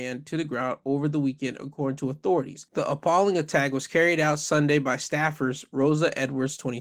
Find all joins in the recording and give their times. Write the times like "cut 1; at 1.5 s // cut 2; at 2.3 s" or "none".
none